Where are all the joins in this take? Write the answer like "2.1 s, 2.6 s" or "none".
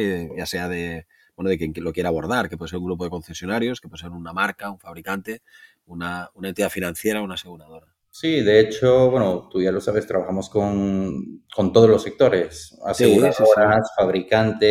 none